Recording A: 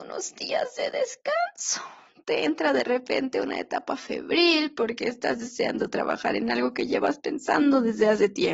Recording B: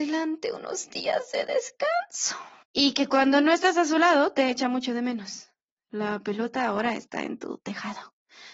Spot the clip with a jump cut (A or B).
B